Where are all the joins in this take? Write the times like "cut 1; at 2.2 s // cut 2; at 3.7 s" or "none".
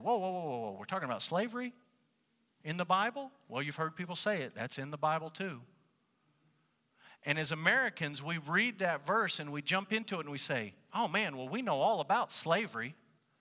cut 1; at 2.5 s

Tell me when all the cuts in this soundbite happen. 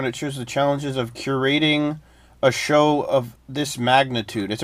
cut 1; at 3.4 s

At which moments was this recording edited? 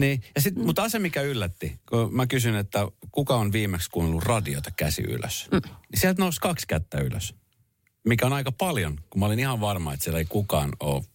none

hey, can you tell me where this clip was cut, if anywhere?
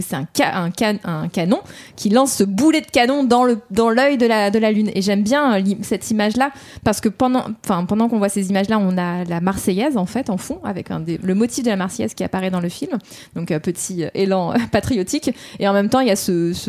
none

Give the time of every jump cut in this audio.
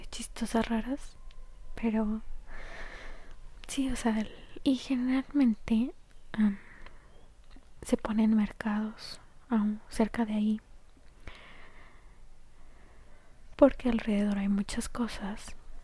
cut 1; at 4.6 s // cut 2; at 13.5 s

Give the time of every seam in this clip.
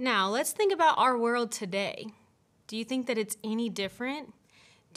none

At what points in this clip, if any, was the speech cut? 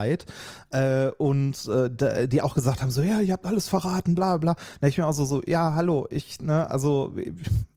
none

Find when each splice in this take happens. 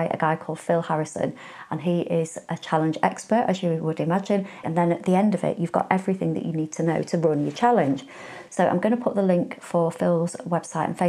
cut 1; at 4.6 s // cut 2; at 8.5 s

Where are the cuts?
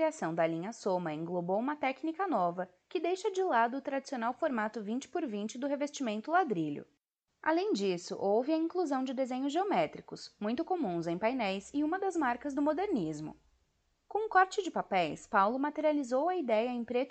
none

